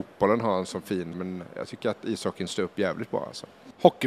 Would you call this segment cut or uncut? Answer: cut